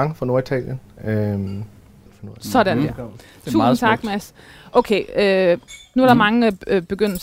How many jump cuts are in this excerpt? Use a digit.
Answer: 1